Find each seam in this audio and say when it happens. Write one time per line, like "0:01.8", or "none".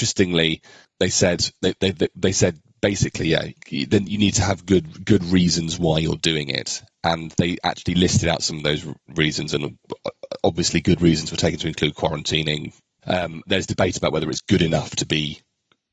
0:03.6
0:13.0